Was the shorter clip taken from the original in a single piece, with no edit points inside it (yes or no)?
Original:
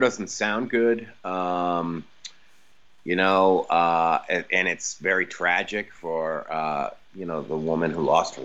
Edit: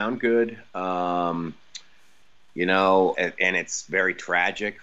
no